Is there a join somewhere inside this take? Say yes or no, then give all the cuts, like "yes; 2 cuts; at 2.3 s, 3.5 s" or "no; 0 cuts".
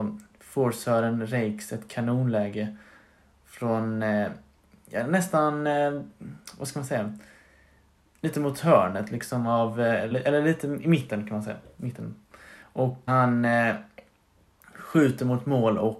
yes; 2 cuts; at 10.1 s, 13.1 s